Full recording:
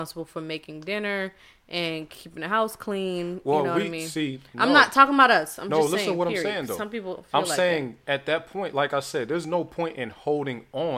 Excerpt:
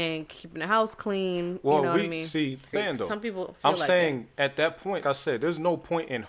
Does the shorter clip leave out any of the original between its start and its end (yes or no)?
yes